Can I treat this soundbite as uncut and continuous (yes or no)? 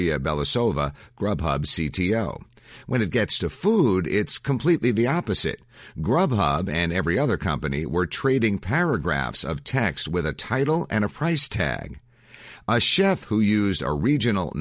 yes